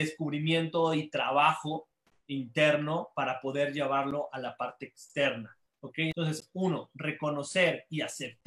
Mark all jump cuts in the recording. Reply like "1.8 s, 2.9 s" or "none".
6.1 s